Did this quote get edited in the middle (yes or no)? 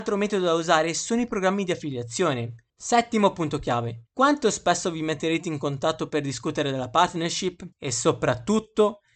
yes